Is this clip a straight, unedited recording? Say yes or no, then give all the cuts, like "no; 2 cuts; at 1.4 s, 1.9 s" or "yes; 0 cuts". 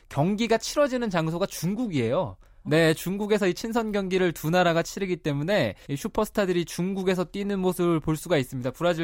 no; 2 cuts; at 2.6 s, 5.8 s